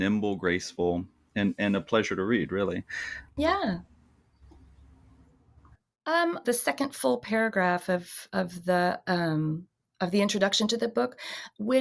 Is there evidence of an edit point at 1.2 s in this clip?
no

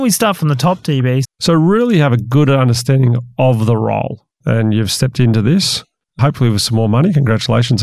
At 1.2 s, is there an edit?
yes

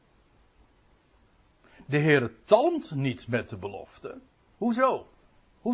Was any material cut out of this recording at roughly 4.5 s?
yes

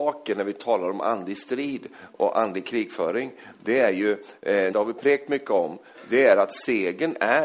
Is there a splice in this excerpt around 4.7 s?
yes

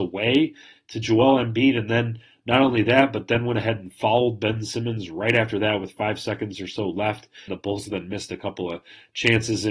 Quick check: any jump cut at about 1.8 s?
no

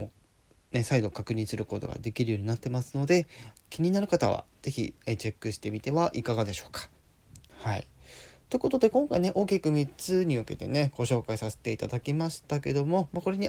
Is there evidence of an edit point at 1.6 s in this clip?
no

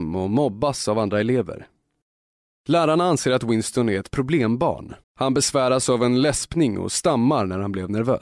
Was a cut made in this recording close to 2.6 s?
no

